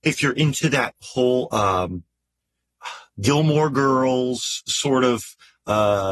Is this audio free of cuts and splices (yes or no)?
no